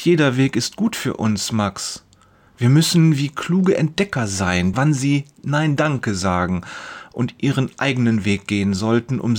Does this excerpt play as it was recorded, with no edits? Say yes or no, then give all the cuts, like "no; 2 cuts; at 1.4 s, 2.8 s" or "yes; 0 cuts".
no; 2 cuts; at 2.5 s, 4.7 s